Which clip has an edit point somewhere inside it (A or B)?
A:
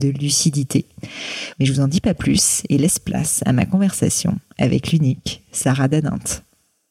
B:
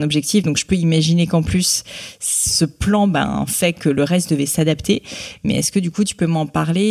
A